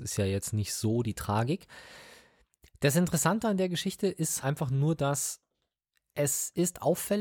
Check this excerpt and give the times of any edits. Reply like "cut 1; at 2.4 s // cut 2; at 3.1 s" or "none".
cut 1; at 4.4 s